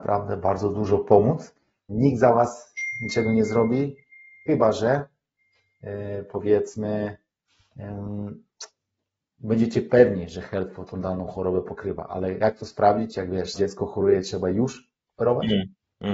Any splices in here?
yes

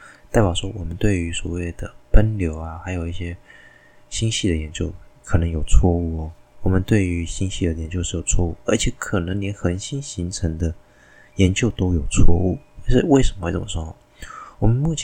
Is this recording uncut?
yes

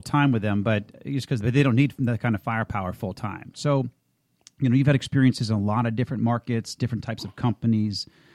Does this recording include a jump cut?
yes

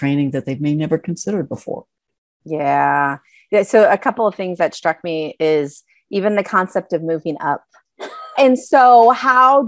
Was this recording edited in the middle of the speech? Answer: yes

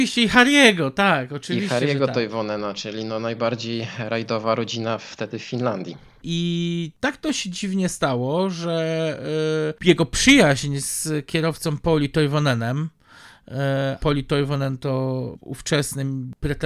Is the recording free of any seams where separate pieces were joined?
no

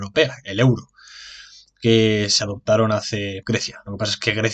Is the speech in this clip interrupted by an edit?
yes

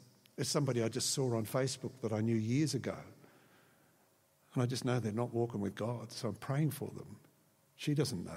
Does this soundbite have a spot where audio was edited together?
no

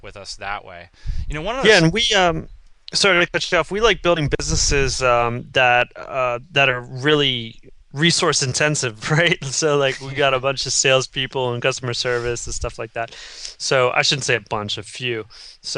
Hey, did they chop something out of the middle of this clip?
no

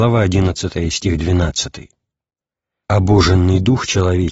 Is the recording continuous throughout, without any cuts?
no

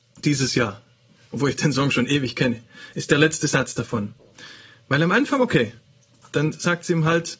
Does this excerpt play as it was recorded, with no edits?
yes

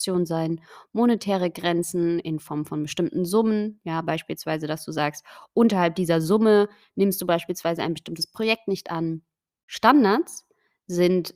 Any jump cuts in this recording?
no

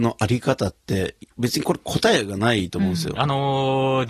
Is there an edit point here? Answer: yes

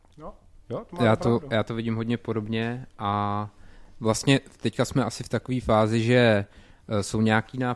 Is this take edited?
no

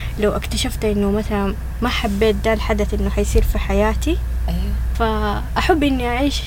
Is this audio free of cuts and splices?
no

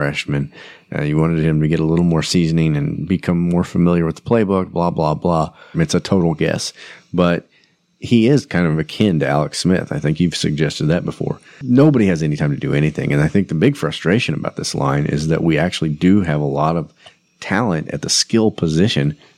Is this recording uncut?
no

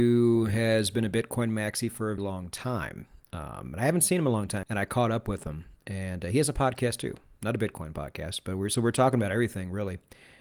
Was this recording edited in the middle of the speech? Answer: yes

